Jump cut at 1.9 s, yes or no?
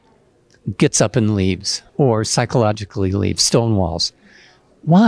yes